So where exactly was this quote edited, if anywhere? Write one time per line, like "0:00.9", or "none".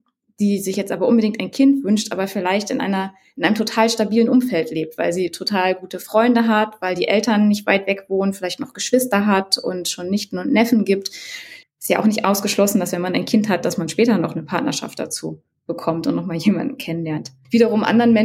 0:11.6